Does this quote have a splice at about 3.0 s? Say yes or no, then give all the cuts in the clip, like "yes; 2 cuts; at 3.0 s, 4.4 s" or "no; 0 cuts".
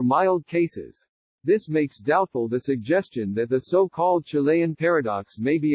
no; 1 cut; at 1.3 s